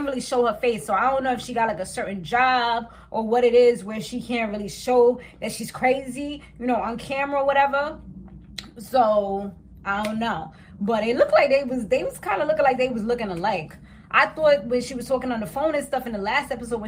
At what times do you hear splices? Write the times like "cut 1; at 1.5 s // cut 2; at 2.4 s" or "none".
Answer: none